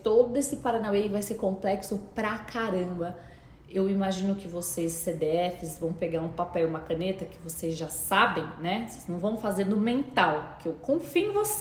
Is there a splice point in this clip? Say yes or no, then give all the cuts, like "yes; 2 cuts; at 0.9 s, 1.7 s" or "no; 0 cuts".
no; 0 cuts